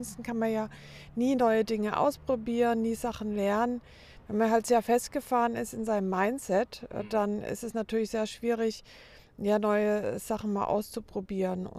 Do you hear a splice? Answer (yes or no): no